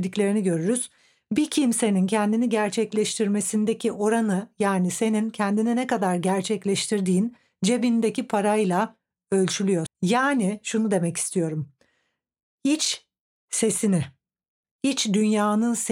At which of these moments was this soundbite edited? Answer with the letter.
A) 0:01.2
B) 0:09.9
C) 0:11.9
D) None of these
B